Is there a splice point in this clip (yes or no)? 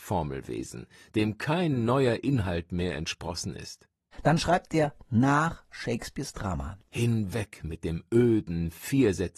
yes